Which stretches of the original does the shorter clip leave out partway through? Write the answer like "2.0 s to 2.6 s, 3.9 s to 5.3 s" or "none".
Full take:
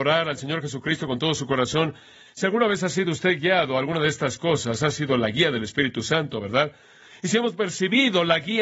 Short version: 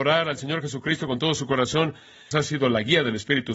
2.3 s to 4.8 s